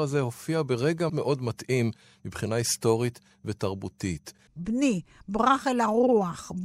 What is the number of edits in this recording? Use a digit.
2